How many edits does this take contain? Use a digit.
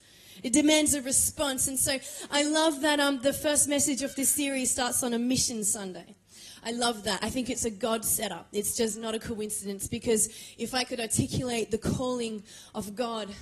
0